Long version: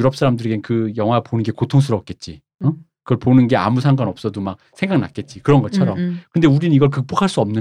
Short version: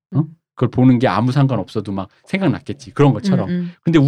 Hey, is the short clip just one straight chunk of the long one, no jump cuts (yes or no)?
yes